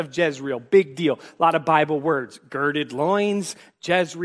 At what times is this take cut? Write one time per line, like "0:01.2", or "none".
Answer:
none